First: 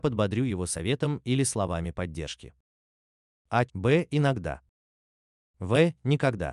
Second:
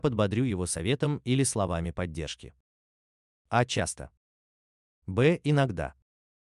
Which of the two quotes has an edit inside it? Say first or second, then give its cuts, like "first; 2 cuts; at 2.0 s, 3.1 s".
first; 1 cut; at 3.7 s